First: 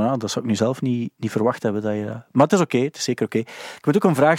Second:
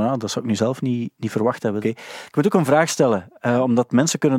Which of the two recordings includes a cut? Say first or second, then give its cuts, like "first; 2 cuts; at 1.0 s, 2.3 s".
second; 1 cut; at 1.8 s